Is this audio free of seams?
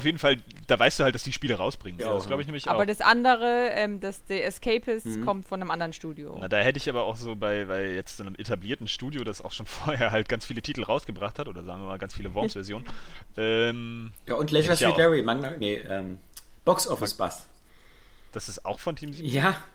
no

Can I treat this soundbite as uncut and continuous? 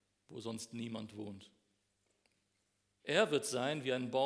no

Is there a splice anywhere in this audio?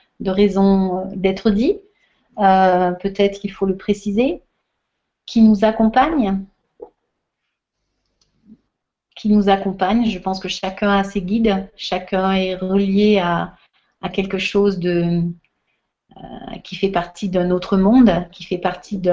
no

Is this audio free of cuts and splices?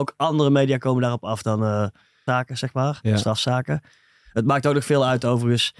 no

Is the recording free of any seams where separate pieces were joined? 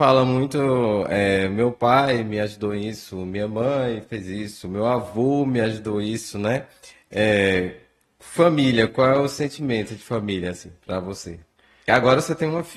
yes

